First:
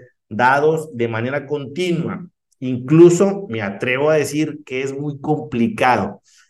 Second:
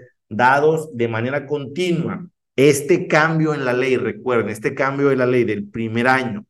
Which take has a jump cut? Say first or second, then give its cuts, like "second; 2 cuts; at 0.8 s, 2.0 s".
second; 1 cut; at 2.5 s